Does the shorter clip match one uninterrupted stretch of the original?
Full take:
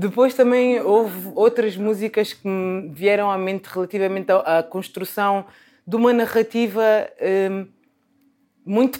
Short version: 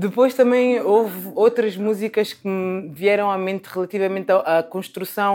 yes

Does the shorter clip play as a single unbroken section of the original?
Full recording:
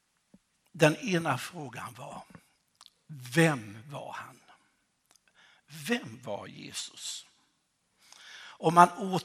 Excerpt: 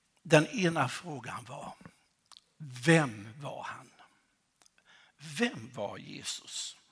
yes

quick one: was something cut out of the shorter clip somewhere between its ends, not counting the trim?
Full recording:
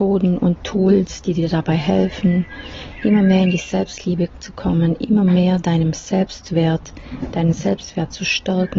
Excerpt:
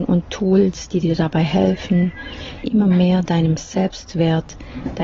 yes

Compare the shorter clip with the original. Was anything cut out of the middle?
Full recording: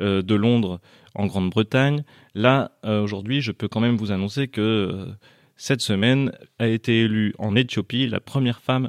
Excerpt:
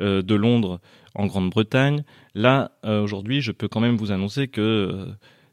no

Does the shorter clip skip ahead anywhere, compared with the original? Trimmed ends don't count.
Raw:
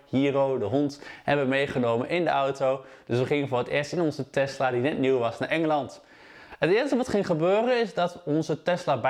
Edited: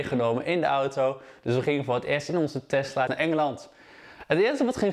yes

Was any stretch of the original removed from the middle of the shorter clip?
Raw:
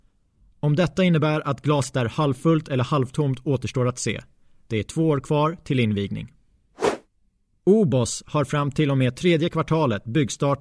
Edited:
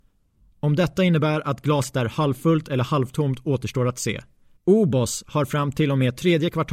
yes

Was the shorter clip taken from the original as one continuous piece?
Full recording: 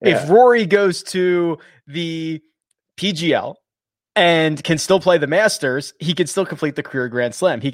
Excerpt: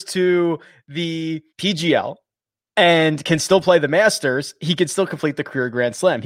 no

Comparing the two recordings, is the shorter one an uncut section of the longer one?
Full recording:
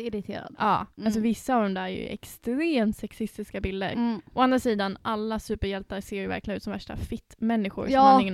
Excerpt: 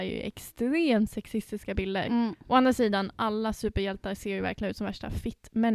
yes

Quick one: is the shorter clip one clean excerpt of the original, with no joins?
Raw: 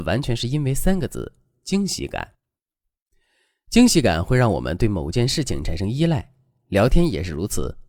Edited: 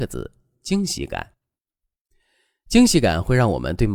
yes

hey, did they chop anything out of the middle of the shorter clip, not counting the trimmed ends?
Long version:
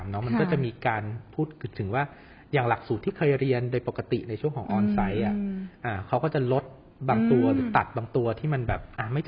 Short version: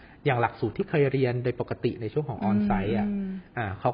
no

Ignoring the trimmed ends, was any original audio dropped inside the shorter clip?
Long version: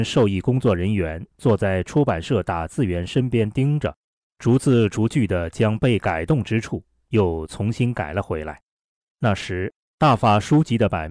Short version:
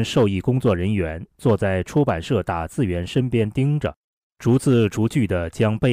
no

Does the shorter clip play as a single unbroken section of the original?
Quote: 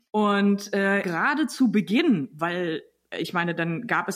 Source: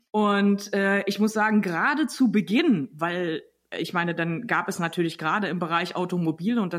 no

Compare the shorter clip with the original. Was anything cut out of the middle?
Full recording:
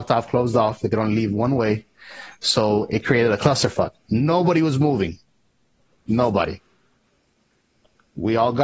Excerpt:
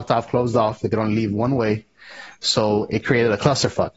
no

